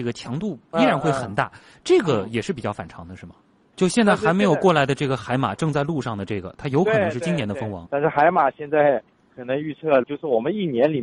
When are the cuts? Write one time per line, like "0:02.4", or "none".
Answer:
0:03.7
0:07.9
0:10.0